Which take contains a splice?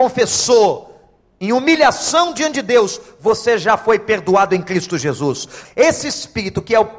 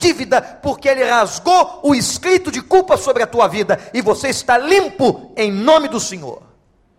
first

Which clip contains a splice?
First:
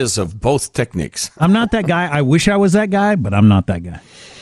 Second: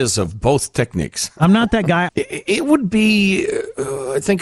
second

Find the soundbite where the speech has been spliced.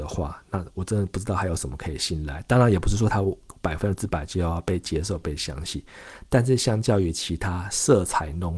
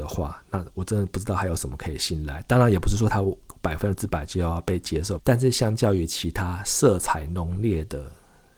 second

